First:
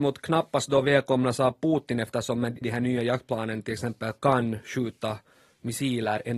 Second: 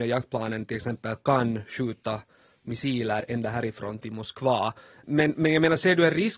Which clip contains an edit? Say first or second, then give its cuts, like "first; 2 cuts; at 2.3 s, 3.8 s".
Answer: first; 1 cut; at 2.6 s